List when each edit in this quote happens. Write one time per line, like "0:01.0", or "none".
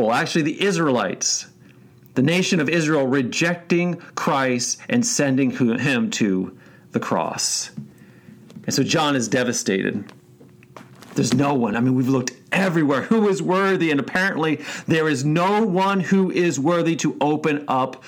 none